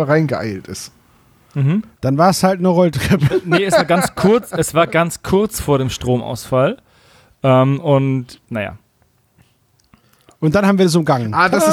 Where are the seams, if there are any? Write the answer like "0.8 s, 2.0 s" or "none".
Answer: 1.9 s